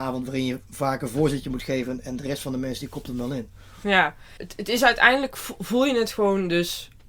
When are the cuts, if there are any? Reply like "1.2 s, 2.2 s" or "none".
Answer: none